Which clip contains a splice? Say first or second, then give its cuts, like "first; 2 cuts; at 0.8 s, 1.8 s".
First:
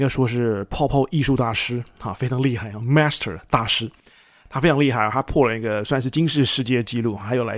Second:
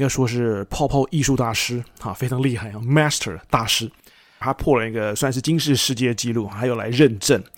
second; 1 cut; at 4.4 s